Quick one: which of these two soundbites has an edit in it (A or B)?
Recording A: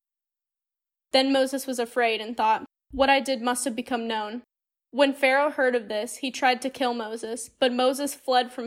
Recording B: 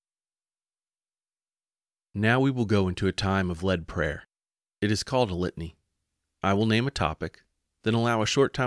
A